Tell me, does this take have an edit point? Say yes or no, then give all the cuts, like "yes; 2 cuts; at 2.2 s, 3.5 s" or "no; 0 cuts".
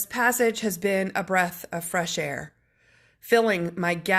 no; 0 cuts